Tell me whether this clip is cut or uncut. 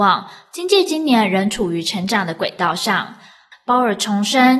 cut